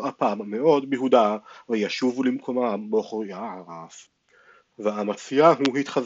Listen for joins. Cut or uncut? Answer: uncut